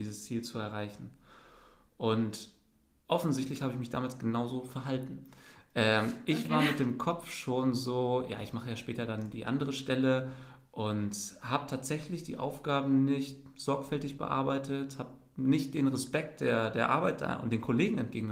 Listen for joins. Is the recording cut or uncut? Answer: uncut